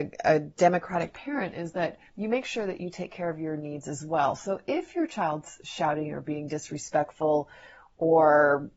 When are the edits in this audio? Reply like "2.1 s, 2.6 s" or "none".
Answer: 2.1 s